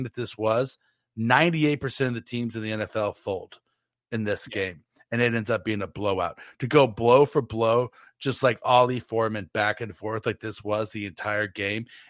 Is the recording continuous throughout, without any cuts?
yes; 0 cuts

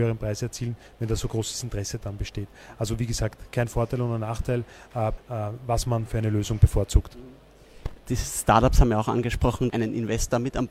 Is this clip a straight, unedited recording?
no; 2 cuts; at 5.2 s, 9.7 s

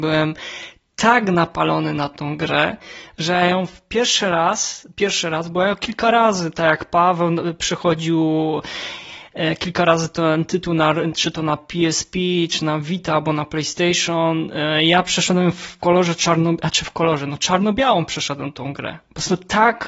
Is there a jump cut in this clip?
no; 0 cuts

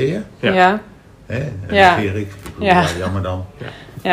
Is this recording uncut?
no; 1 cut; at 1.7 s

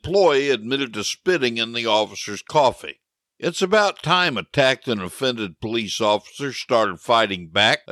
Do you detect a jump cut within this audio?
no; 0 cuts

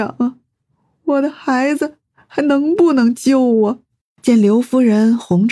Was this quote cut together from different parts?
no; 0 cuts

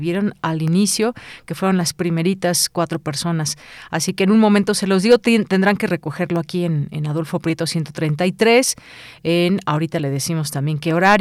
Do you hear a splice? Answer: no; 0 cuts

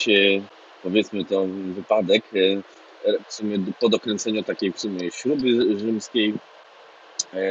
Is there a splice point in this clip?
yes; 1 cut; at 3.2 s

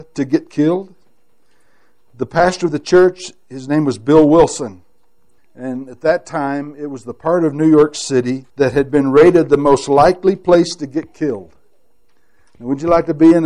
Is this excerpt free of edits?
no; 2 cuts; at 5.4 s, 8.5 s

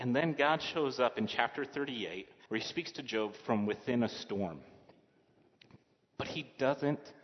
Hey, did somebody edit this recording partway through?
yes; 1 cut; at 2.5 s

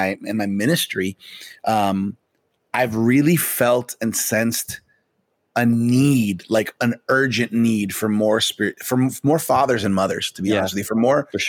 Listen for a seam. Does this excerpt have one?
no; 0 cuts

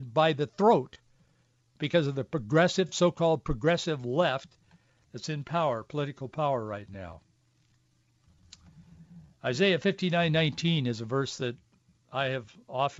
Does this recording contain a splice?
no; 0 cuts

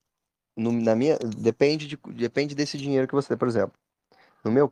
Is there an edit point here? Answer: no; 0 cuts

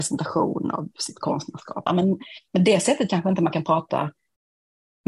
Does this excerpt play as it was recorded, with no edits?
no; 1 cut; at 1.9 s

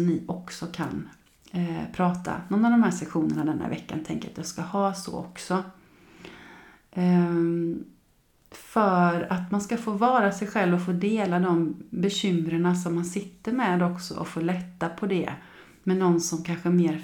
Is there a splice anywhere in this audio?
no; 0 cuts

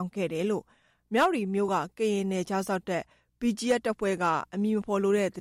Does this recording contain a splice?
no; 0 cuts

